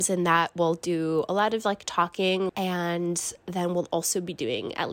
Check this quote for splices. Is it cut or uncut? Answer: cut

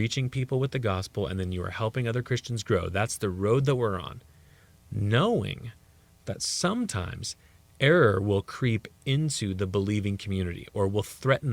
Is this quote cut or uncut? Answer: uncut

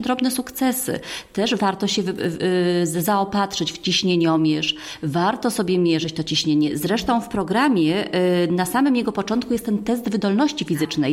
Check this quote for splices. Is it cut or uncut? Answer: uncut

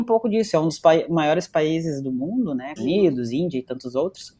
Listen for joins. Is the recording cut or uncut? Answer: cut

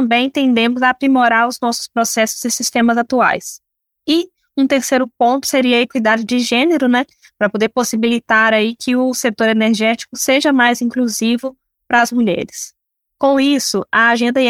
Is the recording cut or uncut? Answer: uncut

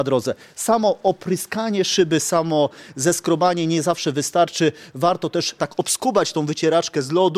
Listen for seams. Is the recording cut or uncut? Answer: cut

